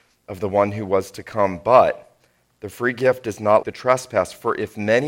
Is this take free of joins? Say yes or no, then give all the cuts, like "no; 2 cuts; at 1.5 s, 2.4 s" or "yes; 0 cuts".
no; 1 cut; at 3.6 s